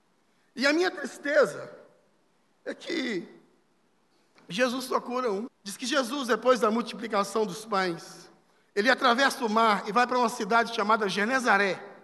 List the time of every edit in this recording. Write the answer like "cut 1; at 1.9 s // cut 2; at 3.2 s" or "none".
cut 1; at 5.5 s